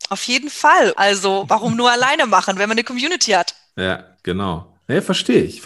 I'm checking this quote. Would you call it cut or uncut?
cut